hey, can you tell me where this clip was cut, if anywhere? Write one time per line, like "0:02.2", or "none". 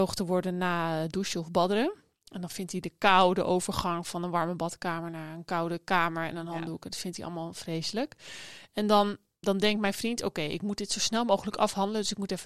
0:09.4